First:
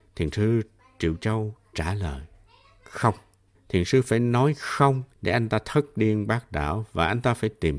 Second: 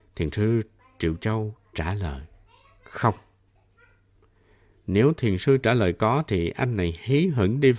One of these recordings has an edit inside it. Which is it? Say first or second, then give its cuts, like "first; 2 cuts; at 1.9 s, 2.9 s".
first; 2 cuts; at 3.5 s, 5.1 s